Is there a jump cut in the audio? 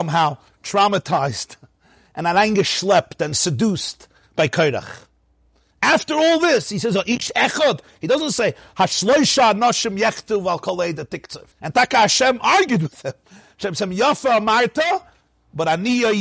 yes; 1 cut; at 11.5 s

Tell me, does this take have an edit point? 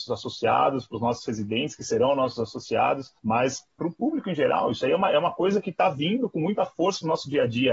yes; 1 cut; at 3.2 s

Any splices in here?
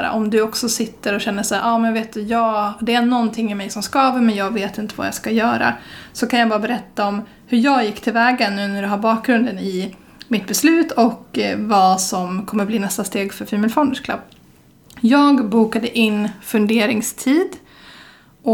no; 0 cuts

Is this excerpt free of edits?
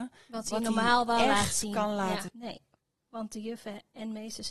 no; 1 cut; at 2.3 s

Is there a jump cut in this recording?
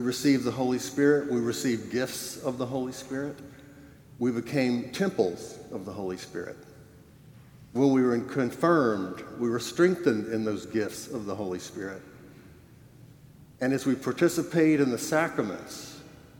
no; 0 cuts

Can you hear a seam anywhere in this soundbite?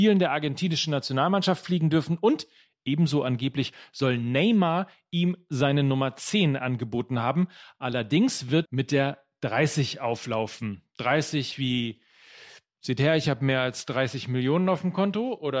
yes; 1 cut; at 8.7 s

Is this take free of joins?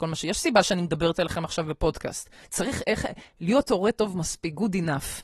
no; 1 cut; at 2.4 s

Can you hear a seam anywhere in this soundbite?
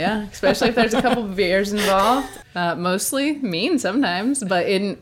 yes; 1 cut; at 2.4 s

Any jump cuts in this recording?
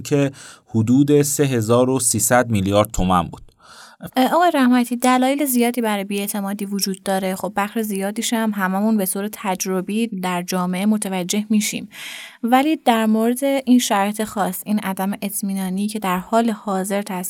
yes; 1 cut; at 4.1 s

